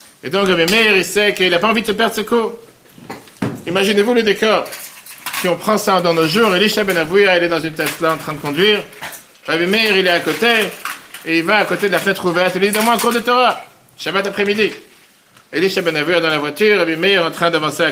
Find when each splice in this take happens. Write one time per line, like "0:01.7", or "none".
none